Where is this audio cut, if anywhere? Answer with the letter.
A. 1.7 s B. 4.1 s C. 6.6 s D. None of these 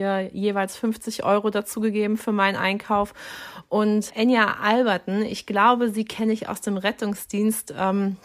B